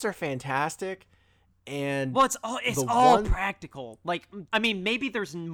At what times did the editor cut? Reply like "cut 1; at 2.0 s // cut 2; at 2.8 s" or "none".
cut 1; at 4.5 s